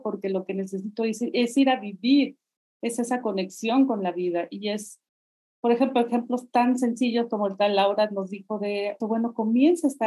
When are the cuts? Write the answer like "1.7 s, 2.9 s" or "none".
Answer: 9.0 s